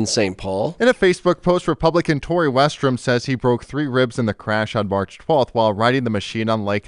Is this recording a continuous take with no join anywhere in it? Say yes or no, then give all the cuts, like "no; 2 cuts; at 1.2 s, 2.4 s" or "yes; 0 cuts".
yes; 0 cuts